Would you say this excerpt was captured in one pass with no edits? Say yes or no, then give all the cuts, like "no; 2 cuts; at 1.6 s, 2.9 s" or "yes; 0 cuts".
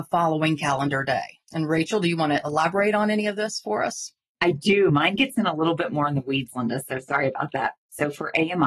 yes; 0 cuts